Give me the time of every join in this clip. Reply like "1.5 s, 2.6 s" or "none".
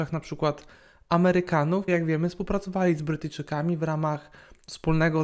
1.9 s